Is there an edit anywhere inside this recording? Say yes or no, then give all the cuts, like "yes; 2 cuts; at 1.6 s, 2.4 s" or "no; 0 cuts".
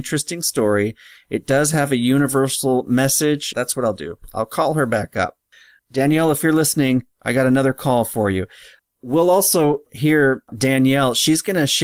yes; 1 cut; at 3.5 s